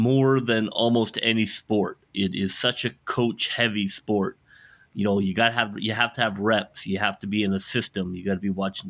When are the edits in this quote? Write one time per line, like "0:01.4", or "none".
none